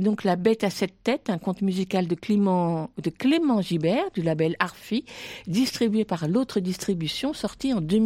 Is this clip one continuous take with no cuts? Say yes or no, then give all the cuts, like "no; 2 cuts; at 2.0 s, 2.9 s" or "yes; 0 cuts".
yes; 0 cuts